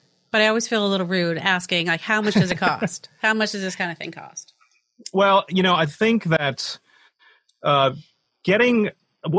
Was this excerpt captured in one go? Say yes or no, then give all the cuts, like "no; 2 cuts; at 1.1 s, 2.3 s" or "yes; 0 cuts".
yes; 0 cuts